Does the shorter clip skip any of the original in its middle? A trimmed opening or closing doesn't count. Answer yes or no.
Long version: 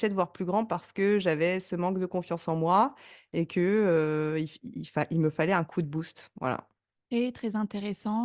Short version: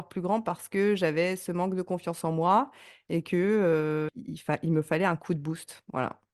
yes